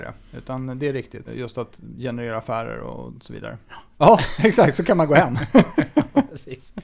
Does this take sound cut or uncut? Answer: cut